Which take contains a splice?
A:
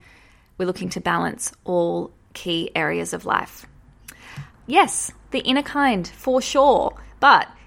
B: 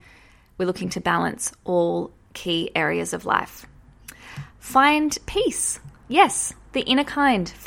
A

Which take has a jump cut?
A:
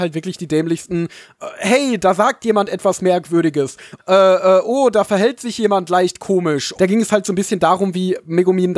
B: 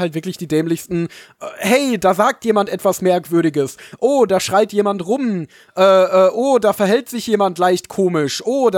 A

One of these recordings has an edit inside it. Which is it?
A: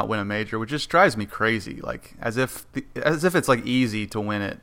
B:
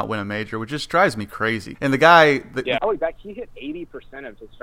B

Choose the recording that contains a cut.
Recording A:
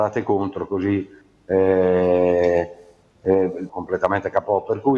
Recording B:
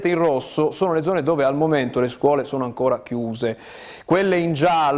A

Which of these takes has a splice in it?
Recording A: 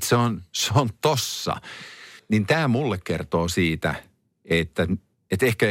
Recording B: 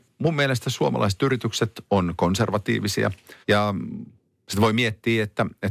B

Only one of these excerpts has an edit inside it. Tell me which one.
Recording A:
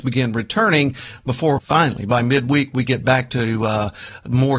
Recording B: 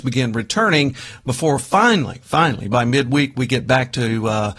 A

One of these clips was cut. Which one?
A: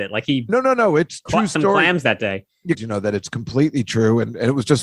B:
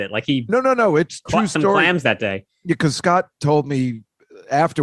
A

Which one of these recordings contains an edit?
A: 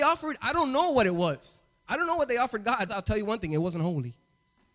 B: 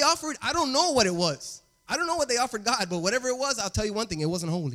A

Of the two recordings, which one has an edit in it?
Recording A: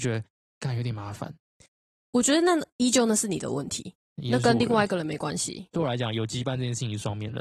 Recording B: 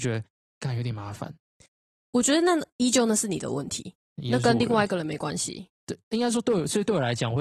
A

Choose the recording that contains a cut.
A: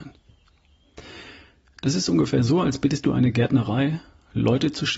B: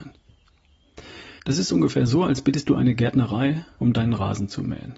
B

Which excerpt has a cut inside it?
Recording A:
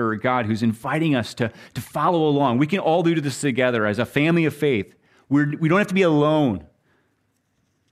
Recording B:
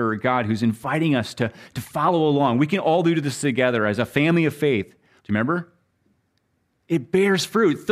B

